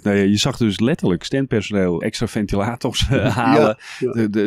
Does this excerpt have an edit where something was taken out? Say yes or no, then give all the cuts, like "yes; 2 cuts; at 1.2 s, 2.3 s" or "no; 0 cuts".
yes; 1 cut; at 2.0 s